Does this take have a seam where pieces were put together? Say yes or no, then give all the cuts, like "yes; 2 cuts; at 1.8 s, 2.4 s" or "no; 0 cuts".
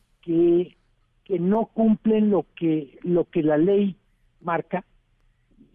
no; 0 cuts